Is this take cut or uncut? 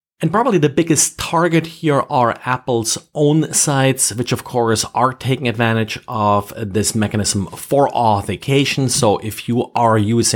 uncut